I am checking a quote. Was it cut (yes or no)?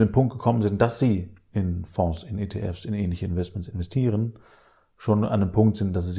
no